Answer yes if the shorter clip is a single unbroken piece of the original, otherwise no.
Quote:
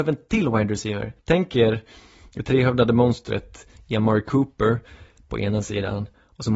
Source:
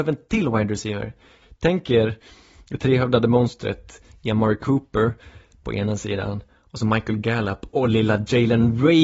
no